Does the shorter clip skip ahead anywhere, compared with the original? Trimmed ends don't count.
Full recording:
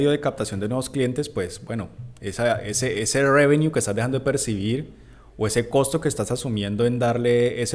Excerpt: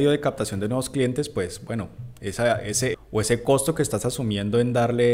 yes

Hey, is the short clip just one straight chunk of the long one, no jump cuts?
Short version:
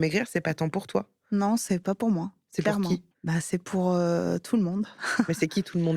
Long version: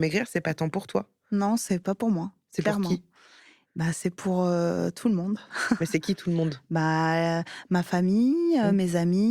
no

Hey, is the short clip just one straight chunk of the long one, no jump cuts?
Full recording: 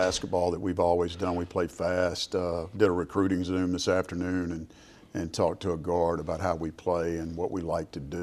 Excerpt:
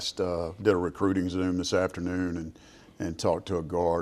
yes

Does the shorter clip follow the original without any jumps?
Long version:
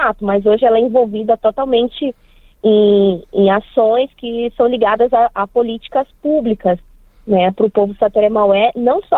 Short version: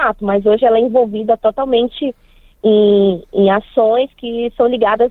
yes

